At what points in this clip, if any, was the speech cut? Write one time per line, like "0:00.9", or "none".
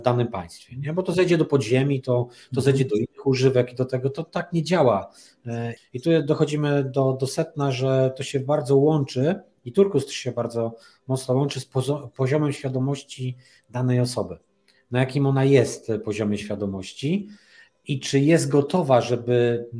0:05.8